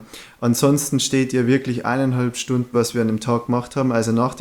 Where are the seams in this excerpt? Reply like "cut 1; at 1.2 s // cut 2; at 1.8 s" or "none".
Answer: cut 1; at 2.7 s